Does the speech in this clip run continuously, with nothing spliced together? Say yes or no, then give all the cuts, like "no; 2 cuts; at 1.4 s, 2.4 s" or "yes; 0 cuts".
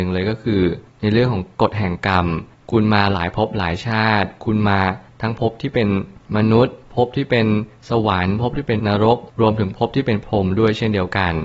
no; 1 cut; at 8.8 s